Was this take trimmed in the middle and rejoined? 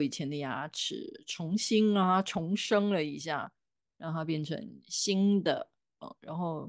no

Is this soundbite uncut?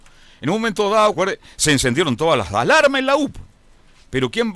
no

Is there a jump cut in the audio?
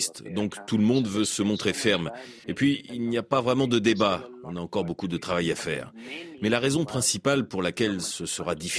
yes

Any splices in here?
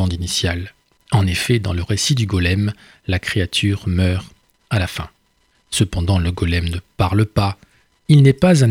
yes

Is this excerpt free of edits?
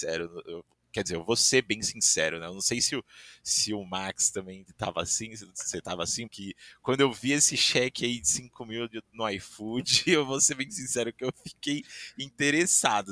no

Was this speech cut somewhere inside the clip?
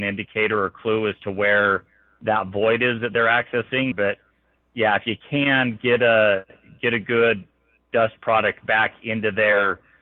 yes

